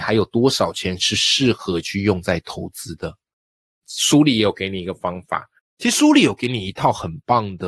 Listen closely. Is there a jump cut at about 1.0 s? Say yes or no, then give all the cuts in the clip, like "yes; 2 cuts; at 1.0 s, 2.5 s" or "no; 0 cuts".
no; 2 cuts; at 3.8 s, 5.6 s